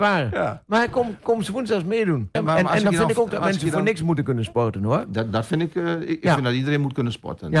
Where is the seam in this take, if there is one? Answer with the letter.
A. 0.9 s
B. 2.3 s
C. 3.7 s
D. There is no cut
B